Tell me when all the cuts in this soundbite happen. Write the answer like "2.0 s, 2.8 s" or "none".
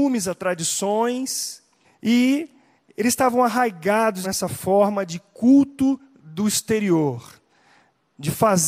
1.8 s, 4.2 s